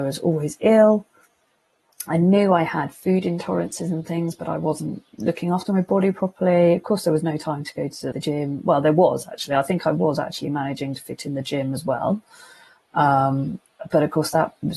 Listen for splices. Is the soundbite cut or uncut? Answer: cut